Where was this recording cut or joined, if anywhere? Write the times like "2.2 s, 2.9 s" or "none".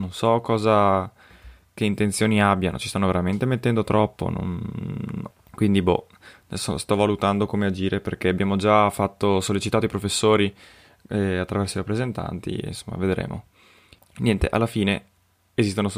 5.3 s, 14.0 s

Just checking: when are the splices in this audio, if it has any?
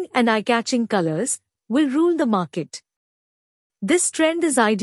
1.5 s

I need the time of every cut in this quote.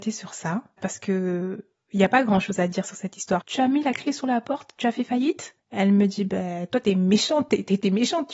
3.4 s, 5.6 s

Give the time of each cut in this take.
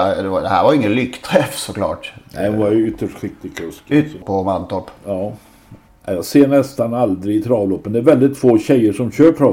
4.2 s, 5.9 s

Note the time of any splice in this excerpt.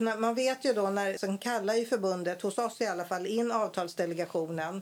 1.2 s

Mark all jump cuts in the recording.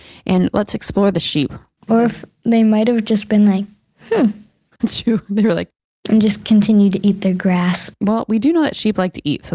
1.8 s

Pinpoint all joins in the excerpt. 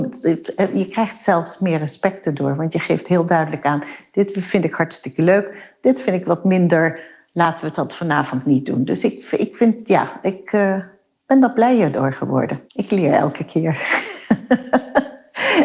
12.7 s

